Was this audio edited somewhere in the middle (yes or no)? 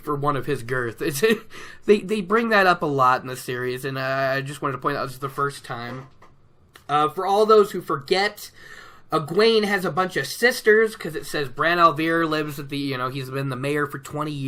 no